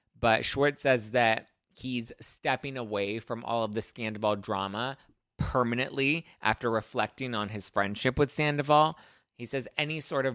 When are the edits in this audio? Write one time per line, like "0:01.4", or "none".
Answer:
none